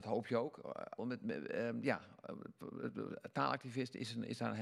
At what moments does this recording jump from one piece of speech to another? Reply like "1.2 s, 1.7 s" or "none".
1.0 s